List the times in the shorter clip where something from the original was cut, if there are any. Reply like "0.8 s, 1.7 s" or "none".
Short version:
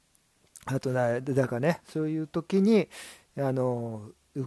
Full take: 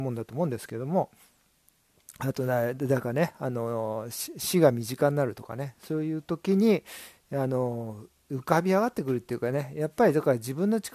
1.8 s